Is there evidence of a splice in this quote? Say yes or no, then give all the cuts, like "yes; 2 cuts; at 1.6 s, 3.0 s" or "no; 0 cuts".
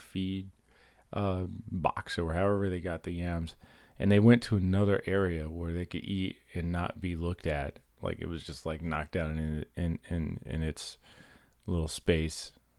yes; 1 cut; at 7.9 s